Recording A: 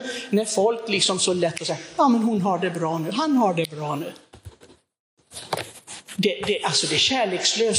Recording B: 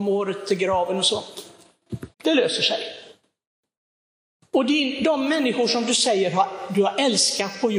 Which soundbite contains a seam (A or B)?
B